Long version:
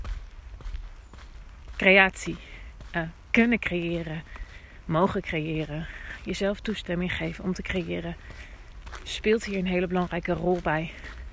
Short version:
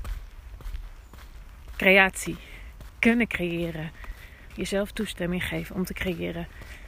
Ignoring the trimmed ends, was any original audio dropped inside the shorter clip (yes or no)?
yes